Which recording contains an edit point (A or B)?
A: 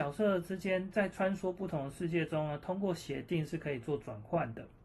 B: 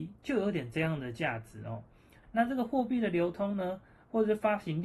B